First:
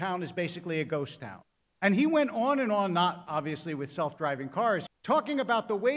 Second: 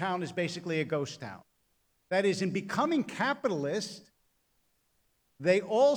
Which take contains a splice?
first; 2 cuts; at 1.7 s, 4.9 s

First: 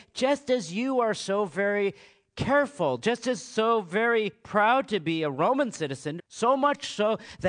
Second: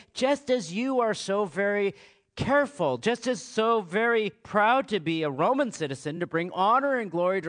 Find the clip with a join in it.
first; 1 cut; at 6.2 s

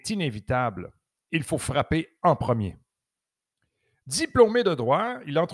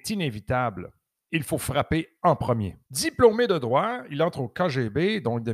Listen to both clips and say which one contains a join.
second; 1 cut; at 2.8 s

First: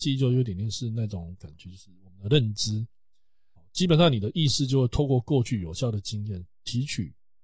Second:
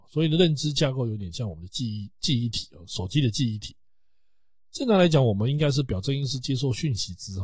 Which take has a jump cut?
first; 1 cut; at 3.6 s

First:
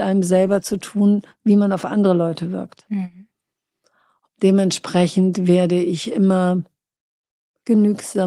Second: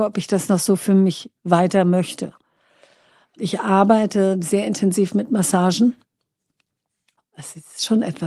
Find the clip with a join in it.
second; 1 cut; at 7.2 s

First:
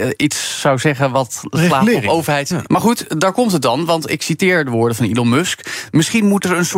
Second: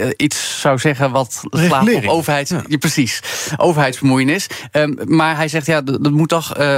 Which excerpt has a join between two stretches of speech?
first; 1 cut; at 2.7 s

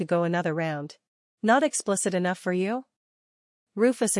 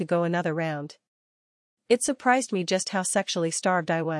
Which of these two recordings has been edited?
first; 1 cut; at 1.4 s

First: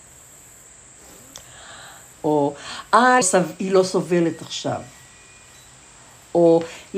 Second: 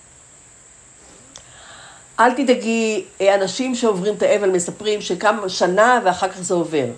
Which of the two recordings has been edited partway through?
first; 2 cuts; at 2.1 s, 3.2 s

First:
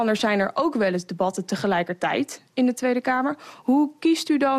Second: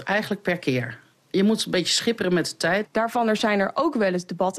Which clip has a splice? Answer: second; 1 cut; at 2.8 s

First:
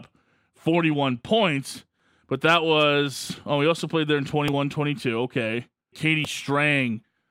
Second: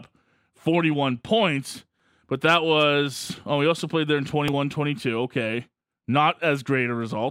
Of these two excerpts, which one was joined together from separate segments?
first; 1 cut; at 5.9 s

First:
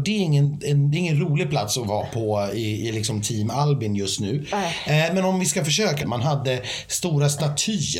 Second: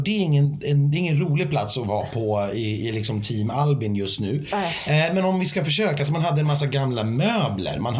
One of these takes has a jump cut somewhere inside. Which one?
first; 1 cut; at 6.0 s

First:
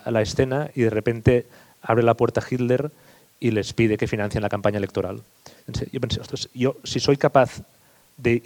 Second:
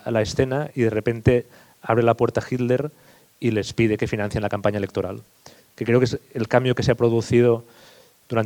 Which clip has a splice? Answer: second; 1 cut; at 5.6 s

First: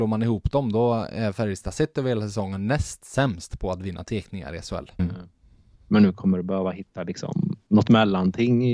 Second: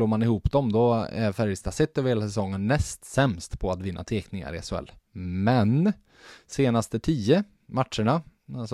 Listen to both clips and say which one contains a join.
first; 2 cuts; at 5.0 s, 7.7 s

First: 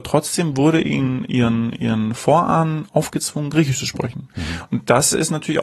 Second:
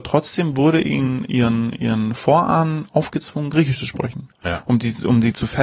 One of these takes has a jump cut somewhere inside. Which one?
second; 1 cut; at 4.3 s

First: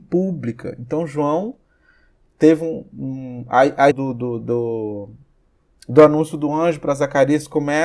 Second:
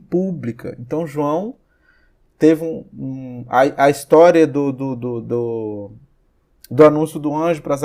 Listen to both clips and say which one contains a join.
first; 1 cut; at 3.9 s

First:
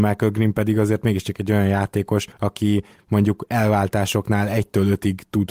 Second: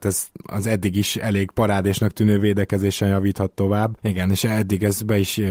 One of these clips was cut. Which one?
second; 1 cut; at 4.0 s

